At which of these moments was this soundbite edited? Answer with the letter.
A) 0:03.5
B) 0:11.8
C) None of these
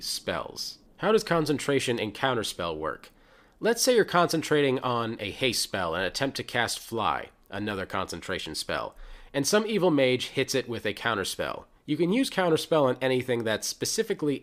B